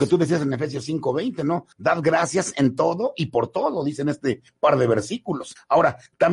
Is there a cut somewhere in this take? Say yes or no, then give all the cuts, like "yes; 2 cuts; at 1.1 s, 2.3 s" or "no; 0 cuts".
no; 0 cuts